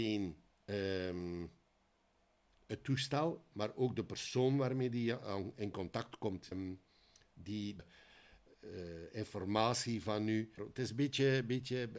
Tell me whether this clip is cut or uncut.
cut